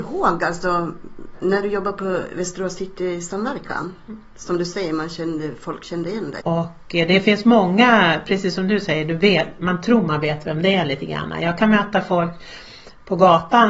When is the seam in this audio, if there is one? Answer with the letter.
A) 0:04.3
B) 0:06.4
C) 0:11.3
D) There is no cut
B